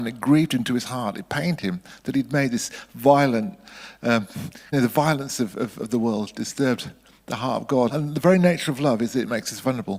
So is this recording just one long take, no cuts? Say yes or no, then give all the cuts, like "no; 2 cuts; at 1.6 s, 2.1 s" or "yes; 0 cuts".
no; 2 cuts; at 4.7 s, 7.9 s